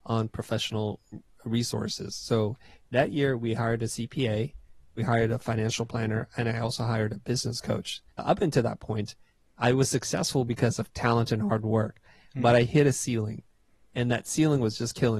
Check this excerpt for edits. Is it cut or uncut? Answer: cut